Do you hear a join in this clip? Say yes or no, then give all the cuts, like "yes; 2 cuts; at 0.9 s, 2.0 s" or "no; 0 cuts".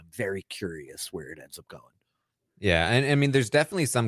no; 0 cuts